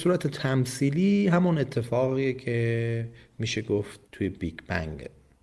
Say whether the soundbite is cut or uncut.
cut